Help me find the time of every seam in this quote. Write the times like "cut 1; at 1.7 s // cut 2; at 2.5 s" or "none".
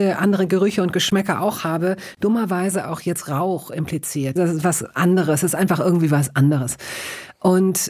cut 1; at 4.4 s